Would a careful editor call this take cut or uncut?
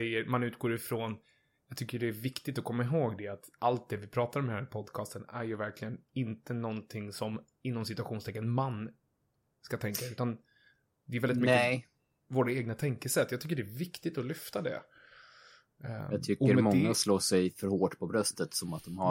uncut